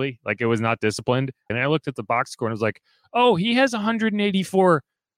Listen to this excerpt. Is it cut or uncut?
cut